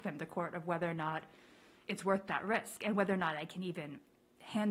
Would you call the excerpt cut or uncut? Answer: uncut